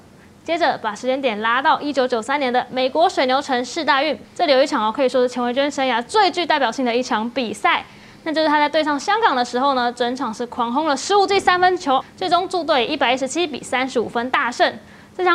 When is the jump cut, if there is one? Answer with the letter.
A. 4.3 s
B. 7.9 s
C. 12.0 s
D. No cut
C